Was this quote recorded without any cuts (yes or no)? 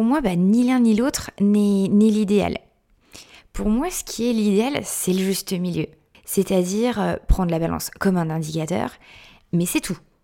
no